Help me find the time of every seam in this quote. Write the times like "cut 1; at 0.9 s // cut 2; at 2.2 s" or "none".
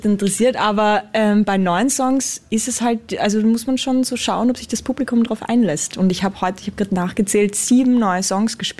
none